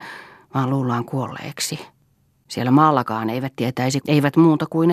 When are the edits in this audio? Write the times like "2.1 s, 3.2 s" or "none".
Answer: 4.0 s